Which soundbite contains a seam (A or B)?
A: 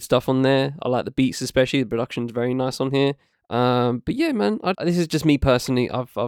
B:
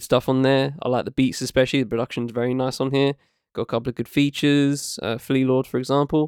A